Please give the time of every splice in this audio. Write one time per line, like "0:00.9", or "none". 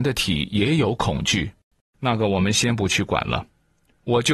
none